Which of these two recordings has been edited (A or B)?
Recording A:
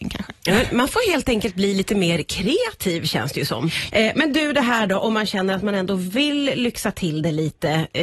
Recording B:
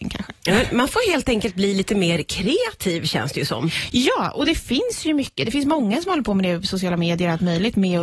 A